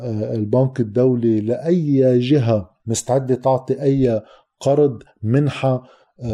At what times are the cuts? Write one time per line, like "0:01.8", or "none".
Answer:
0:02.8

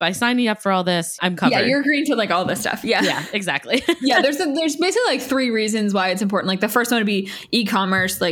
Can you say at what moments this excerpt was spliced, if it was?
0:01.2

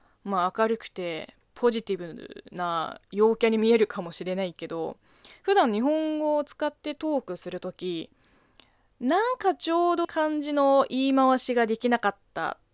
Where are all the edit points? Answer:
0:10.0

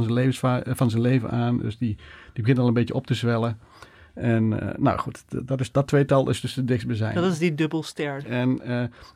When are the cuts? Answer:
0:05.5
0:08.2

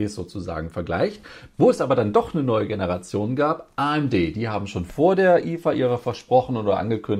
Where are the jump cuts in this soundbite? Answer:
0:01.5

